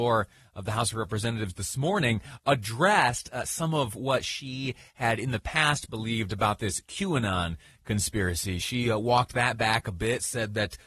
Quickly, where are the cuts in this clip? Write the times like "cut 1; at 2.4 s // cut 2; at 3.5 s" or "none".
none